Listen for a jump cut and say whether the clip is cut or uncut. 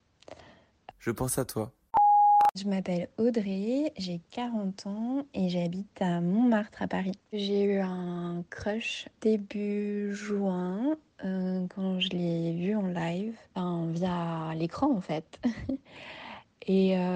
cut